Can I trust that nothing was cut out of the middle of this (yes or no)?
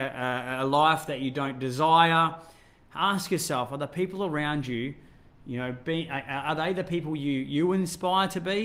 yes